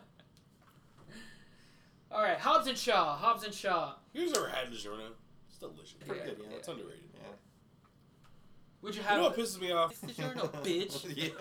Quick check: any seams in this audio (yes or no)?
yes